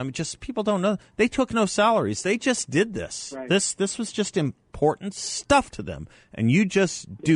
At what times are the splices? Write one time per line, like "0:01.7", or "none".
none